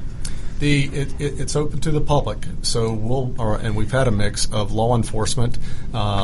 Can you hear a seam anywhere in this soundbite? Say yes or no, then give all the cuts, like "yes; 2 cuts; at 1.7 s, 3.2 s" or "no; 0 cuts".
yes; 1 cut; at 3.4 s